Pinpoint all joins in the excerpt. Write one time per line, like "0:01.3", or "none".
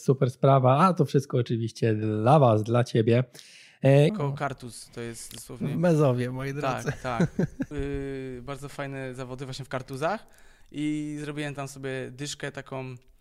0:04.1
0:07.7